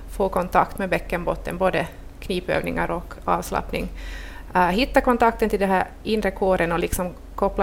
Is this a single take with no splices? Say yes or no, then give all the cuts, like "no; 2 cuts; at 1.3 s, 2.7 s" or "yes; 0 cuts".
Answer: yes; 0 cuts